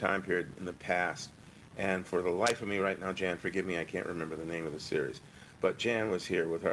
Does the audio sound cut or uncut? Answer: uncut